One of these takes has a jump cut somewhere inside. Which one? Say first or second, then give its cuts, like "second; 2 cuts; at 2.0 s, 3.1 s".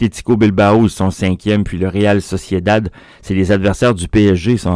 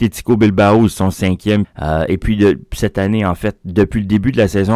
second; 1 cut; at 1.6 s